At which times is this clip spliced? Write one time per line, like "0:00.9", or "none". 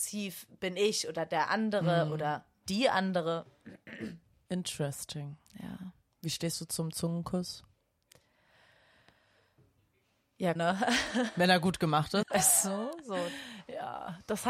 0:04.5
0:10.6
0:12.2